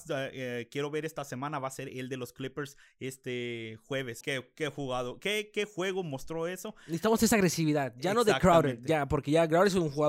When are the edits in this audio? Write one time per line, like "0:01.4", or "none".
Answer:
0:04.2